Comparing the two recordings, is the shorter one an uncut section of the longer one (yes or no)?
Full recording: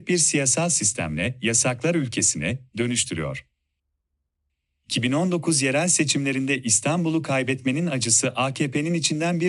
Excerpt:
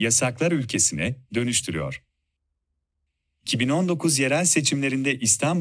yes